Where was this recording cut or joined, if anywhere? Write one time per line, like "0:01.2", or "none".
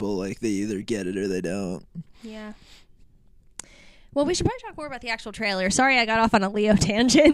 none